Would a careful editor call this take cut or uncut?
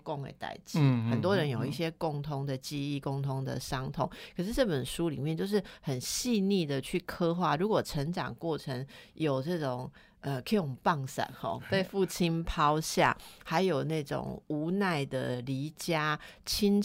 uncut